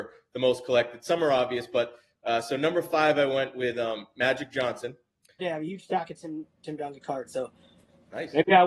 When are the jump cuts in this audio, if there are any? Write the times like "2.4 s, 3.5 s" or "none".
5.4 s